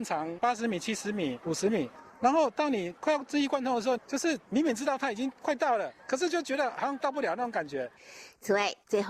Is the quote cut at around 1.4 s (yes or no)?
no